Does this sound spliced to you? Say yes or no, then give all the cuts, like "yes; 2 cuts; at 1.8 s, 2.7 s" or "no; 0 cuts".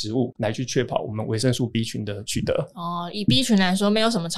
no; 0 cuts